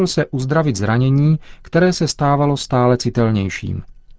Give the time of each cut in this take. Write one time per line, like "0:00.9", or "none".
none